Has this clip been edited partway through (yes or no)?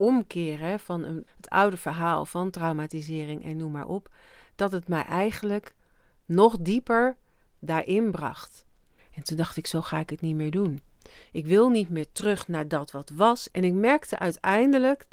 yes